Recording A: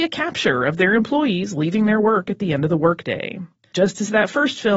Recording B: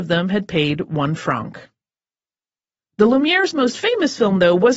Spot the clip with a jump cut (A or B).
A